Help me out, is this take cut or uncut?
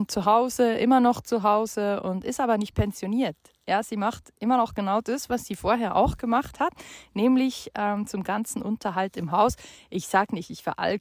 uncut